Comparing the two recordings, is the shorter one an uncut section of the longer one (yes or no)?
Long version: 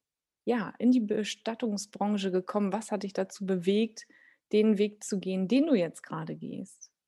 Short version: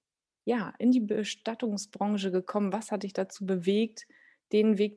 yes